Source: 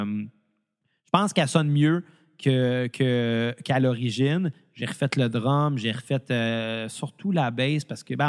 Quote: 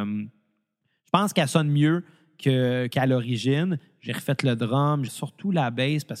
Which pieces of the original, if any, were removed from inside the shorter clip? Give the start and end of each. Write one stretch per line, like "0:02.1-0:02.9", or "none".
0:02.9-0:03.6
0:05.8-0:06.9